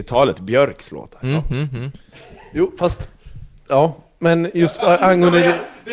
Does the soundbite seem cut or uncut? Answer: cut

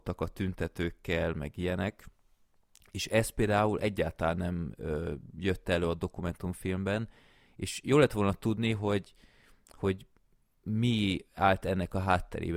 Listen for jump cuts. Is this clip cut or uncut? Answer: uncut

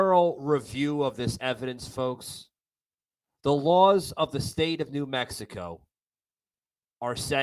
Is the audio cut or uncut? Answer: uncut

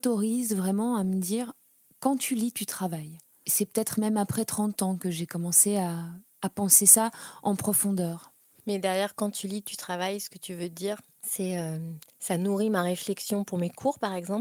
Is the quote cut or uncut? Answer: uncut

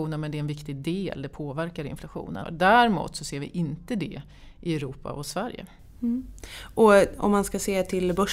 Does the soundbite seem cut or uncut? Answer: cut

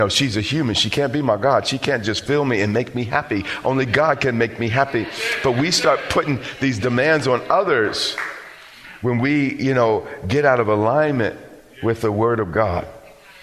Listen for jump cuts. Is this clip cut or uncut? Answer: uncut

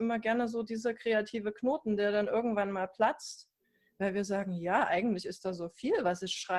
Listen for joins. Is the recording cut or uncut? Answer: uncut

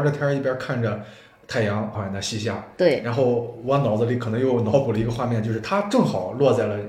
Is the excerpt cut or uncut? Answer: cut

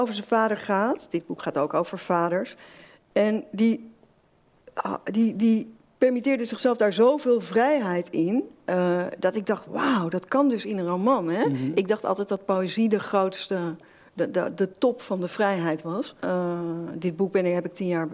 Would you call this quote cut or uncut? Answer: cut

